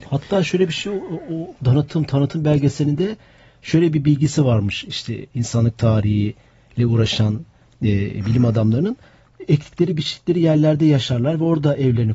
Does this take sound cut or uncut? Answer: uncut